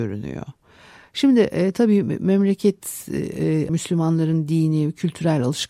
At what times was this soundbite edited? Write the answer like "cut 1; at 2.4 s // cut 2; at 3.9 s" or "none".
cut 1; at 3.7 s